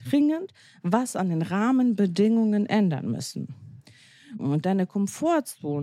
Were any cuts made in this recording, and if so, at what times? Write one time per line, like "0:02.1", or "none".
0:04.4